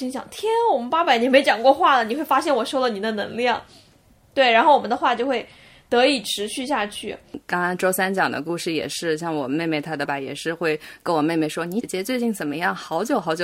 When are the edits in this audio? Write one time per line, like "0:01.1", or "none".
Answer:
0:10.1
0:11.8

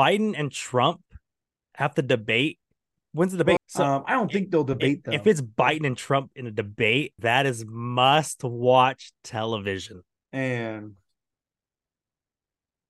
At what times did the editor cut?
0:03.6
0:07.2

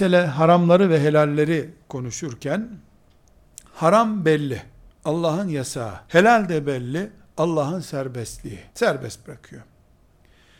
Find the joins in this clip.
0:06.0
0:08.7

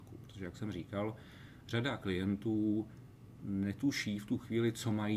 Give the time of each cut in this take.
none

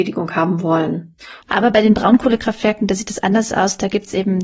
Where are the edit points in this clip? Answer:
0:01.4

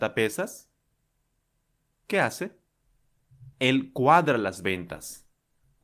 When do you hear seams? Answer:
0:03.5

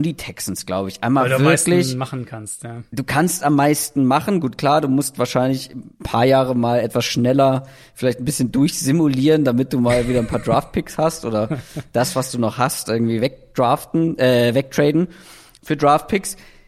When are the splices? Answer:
none

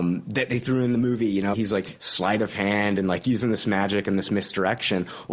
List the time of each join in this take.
0:01.5

